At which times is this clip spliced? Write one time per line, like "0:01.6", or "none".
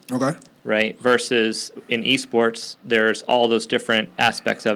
none